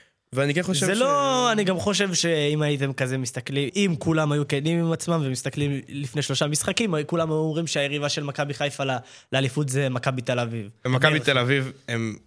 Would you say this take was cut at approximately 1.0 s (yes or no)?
no